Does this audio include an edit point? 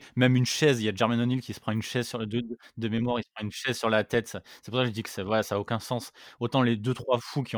no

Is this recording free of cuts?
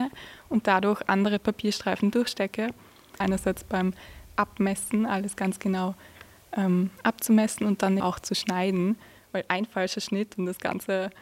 no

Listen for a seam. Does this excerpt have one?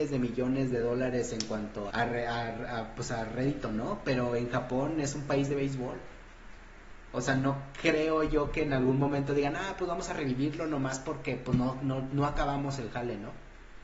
yes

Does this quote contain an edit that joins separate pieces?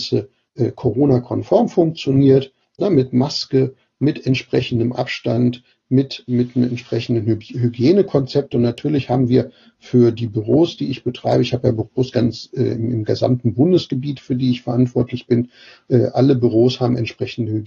yes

